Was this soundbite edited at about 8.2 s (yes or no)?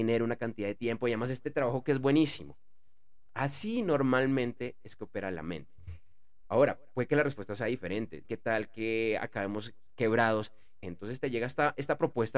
yes